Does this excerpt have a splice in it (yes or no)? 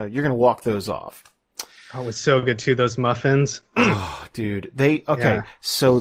no